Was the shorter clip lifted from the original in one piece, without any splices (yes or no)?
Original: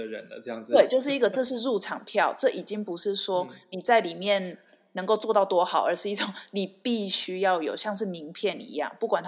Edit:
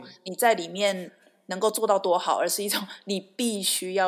yes